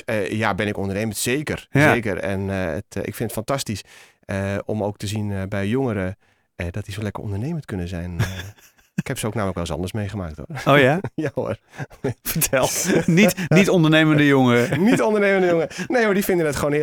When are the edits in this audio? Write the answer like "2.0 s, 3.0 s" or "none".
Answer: none